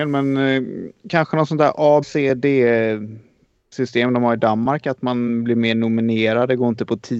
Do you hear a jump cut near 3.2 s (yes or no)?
no